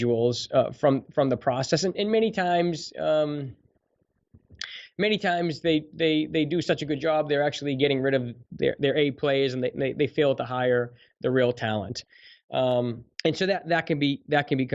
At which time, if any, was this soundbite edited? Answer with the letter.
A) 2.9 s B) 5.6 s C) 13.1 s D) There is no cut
C